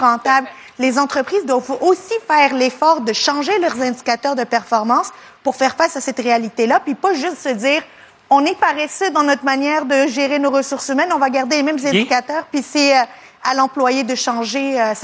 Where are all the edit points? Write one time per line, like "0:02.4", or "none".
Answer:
none

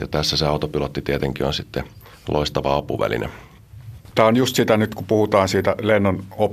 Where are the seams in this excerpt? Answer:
0:04.1

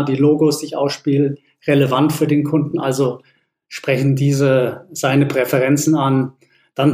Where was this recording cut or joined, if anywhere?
none

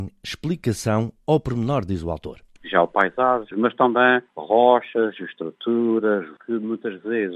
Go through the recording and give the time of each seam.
0:03.5
0:06.4

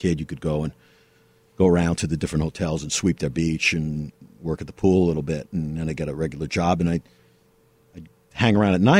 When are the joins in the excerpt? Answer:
none

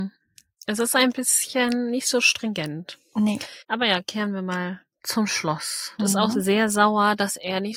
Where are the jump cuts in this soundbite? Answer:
0:03.6
0:06.0

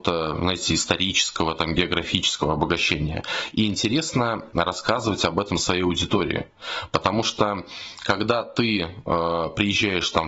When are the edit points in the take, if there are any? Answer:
none

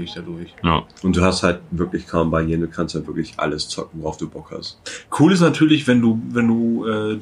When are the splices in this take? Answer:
0:00.9
0:05.8

